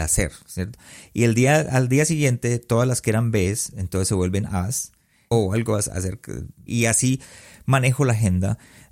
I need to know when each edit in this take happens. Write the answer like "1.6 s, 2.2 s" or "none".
5.3 s, 6.7 s